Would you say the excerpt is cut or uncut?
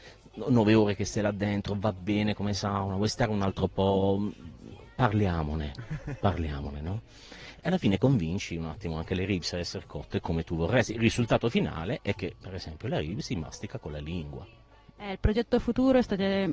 uncut